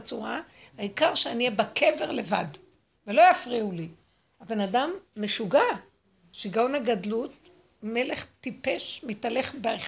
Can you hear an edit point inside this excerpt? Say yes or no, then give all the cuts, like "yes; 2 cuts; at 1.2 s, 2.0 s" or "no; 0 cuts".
no; 0 cuts